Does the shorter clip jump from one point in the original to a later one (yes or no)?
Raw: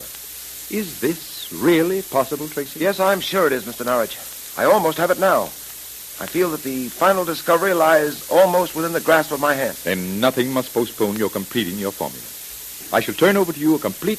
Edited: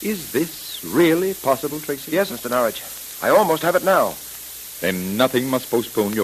yes